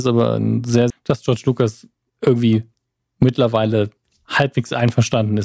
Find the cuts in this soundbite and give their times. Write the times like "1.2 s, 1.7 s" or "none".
0.9 s

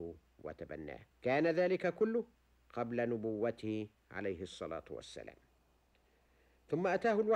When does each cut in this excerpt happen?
1.1 s

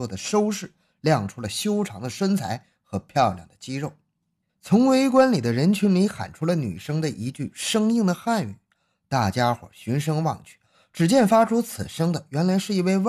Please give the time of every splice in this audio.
4.5 s

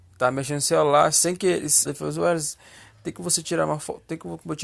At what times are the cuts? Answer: 1.9 s

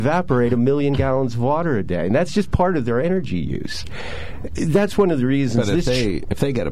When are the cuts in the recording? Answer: none

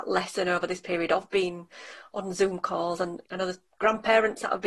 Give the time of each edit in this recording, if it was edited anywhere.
3.7 s

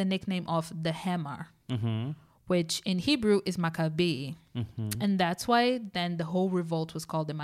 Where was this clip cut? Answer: none

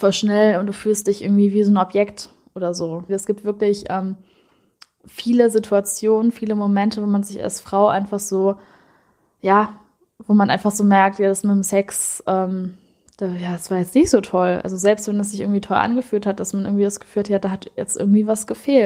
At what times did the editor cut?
3.1 s

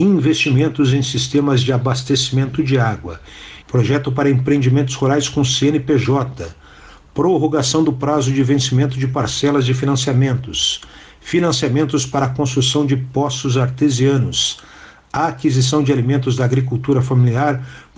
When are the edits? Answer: 3.6 s

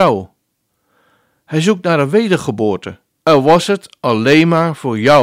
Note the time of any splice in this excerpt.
3.2 s

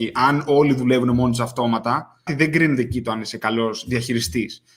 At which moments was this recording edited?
2.3 s

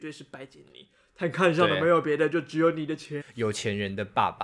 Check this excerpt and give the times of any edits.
3.2 s

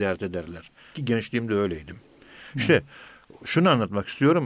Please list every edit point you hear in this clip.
0.9 s

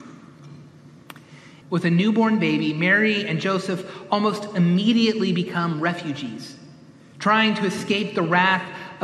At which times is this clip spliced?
1.6 s

